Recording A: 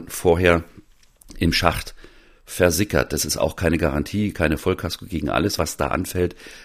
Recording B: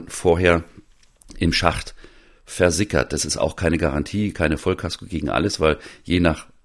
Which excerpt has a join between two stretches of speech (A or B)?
A